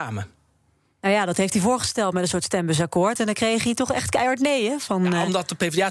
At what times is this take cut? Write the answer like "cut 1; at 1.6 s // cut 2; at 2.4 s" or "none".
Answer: none